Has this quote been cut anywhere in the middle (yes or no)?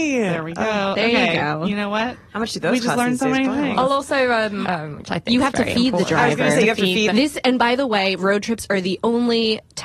yes